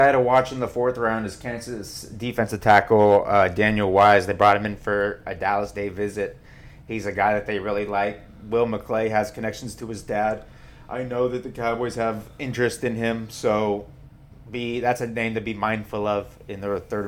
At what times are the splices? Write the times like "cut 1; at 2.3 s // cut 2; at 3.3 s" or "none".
none